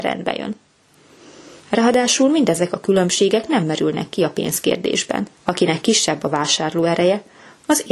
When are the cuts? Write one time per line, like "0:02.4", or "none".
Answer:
0:01.6
0:05.3